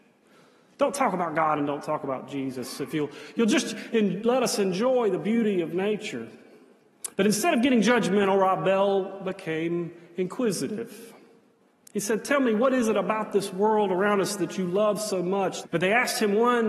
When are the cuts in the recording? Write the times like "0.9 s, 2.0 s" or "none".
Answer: 7.1 s, 15.6 s